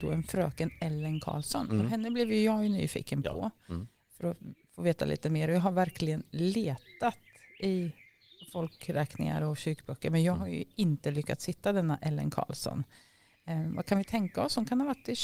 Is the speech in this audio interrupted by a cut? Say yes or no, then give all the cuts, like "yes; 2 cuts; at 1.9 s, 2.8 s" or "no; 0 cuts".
no; 0 cuts